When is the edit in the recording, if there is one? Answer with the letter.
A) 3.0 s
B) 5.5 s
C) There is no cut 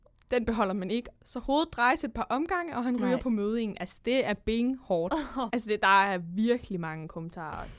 B